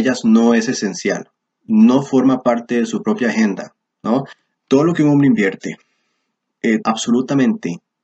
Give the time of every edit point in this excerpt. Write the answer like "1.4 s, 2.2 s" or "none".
4.5 s, 6.8 s